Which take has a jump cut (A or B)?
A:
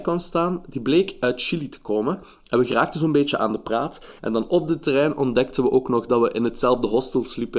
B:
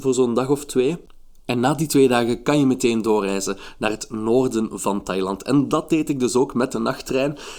A